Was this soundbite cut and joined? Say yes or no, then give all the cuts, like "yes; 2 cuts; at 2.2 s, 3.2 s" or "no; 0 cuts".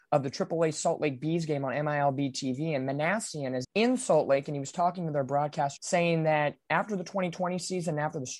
yes; 2 cuts; at 3.6 s, 5.8 s